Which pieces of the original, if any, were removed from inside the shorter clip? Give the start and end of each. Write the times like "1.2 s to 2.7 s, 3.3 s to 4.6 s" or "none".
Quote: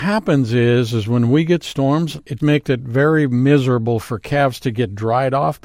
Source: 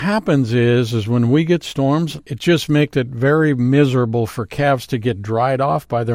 2.4 s to 2.7 s